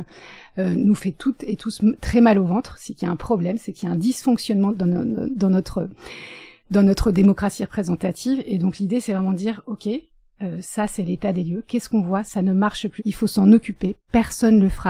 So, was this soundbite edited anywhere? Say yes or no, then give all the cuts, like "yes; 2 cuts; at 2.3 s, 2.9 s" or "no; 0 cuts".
yes; 1 cut; at 13.0 s